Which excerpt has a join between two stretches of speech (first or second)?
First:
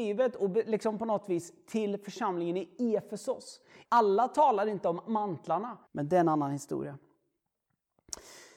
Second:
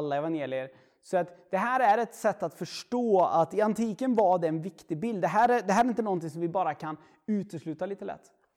first